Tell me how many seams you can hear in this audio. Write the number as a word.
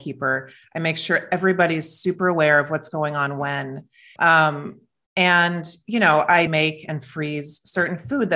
two